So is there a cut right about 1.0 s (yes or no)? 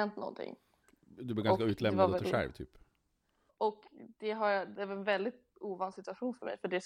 no